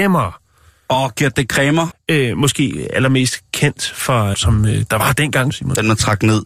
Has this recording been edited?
yes; 3 cuts; at 1.9 s, 4.3 s, 5.5 s

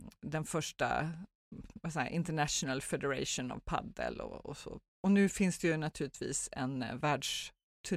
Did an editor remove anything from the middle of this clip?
no; 0 cuts

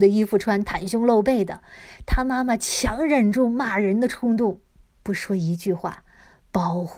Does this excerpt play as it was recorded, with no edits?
yes; 0 cuts

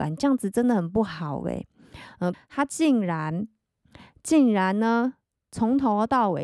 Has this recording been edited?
yes; 1 cut; at 2.3 s

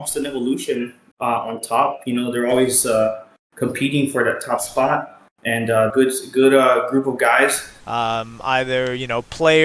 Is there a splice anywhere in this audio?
yes; 3 cuts; at 1.1 s, 5.9 s, 7.8 s

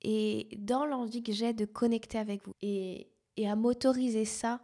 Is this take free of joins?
no; 1 cut; at 2.5 s

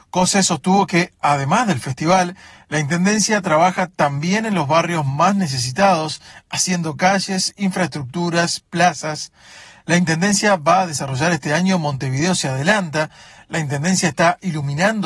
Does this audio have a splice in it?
no; 0 cuts

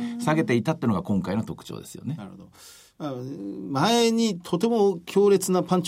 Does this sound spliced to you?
no; 0 cuts

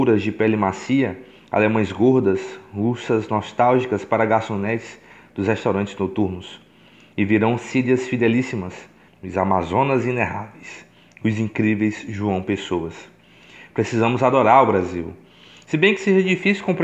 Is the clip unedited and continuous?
no; 1 cut; at 9.1 s

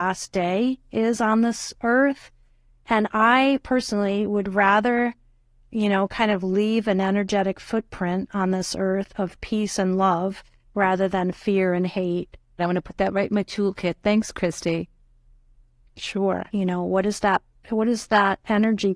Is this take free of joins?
no; 2 cuts; at 12.6 s, 16.5 s

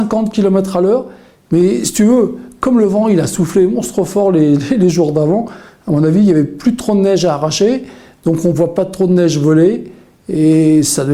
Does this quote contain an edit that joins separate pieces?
no; 0 cuts

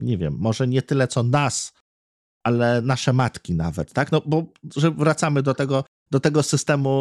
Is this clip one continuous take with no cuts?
yes; 0 cuts

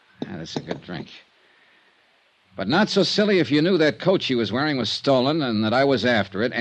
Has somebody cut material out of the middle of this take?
no; 0 cuts

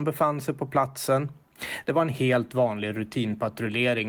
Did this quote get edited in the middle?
yes; 1 cut; at 1.8 s

